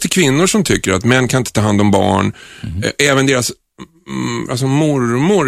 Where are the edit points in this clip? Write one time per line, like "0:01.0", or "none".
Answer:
0:04.5